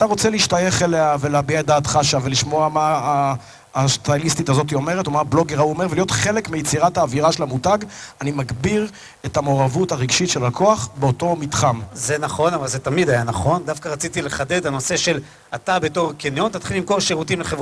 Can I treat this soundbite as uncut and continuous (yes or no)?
yes